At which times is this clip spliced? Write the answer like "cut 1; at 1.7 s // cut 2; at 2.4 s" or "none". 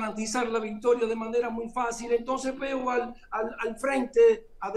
none